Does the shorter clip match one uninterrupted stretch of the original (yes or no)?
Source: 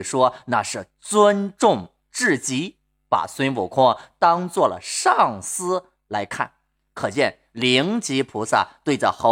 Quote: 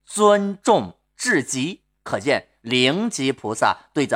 no